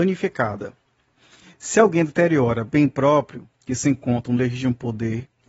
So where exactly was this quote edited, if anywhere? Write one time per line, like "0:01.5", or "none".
none